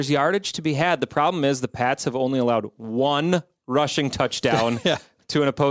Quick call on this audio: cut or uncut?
uncut